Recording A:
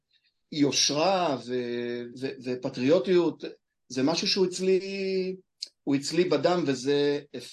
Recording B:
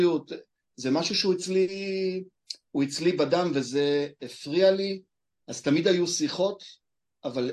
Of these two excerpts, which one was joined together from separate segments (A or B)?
A